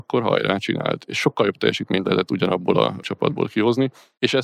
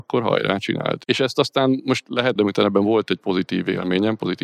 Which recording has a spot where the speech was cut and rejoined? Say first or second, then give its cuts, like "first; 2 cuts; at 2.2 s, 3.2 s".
second; 2 cuts; at 1.0 s, 2.4 s